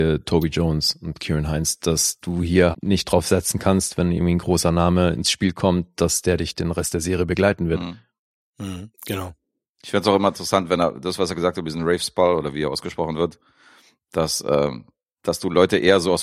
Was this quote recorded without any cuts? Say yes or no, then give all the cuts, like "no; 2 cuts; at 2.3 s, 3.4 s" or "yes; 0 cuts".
no; 1 cut; at 2.7 s